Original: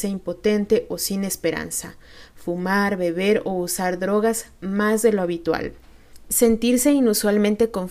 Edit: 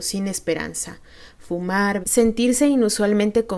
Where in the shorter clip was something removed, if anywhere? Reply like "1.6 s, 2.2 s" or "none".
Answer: 2.0 s